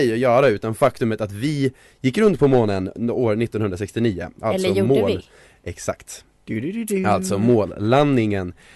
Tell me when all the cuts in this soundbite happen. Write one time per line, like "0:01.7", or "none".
none